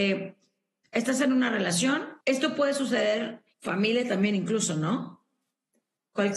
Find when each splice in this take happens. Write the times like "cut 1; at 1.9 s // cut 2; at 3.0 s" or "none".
cut 1; at 2.2 s // cut 2; at 3.5 s